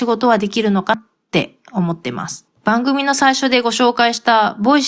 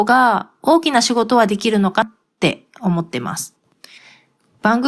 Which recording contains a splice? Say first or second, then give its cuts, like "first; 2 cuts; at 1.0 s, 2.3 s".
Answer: first; 1 cut; at 2.6 s